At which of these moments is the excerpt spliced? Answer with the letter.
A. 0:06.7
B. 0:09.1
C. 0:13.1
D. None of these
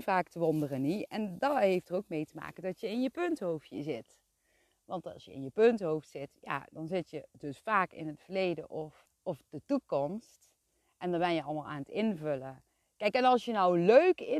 B